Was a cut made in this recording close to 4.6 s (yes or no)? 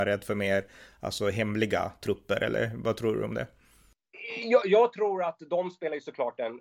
yes